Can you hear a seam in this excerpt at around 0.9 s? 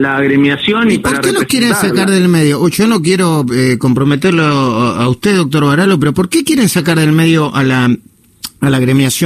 no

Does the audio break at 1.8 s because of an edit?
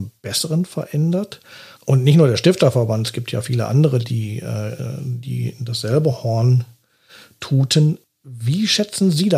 yes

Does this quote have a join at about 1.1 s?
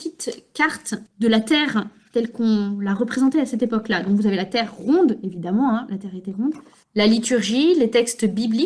yes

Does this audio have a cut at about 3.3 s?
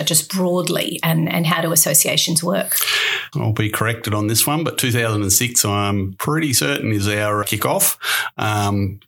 yes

